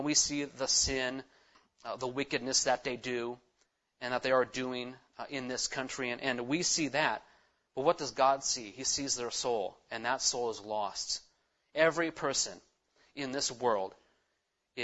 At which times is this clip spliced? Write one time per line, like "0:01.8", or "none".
0:01.5